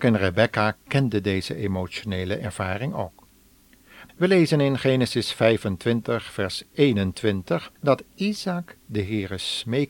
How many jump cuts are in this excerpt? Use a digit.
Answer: 2